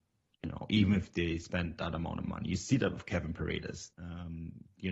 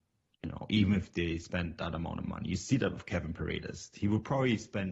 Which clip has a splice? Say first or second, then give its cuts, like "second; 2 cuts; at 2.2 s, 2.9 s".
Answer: first; 1 cut; at 3.9 s